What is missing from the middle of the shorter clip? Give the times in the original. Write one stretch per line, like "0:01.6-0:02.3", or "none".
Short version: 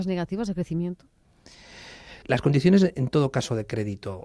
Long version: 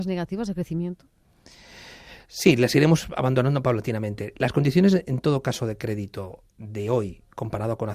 0:02.2-0:04.3